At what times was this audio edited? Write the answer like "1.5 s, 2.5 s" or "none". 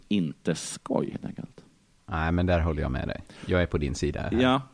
none